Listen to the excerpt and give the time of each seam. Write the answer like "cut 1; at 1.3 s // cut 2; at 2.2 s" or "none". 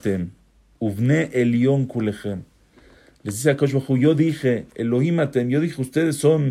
none